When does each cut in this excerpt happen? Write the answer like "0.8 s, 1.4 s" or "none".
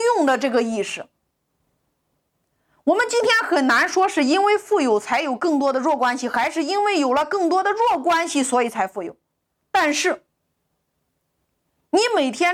none